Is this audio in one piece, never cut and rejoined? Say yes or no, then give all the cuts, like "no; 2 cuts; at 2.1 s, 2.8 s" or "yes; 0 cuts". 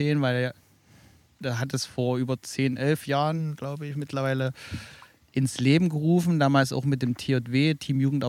yes; 0 cuts